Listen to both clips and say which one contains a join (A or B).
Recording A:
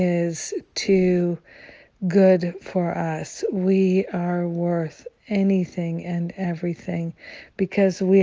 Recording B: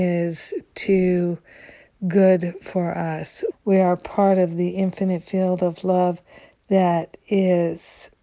B